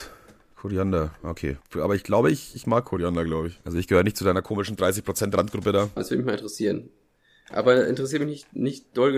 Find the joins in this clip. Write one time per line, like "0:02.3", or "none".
0:01.6
0:06.0